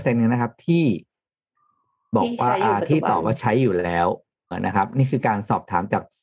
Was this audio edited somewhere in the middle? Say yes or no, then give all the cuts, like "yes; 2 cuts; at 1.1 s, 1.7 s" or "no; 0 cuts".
yes; 1 cut; at 4.5 s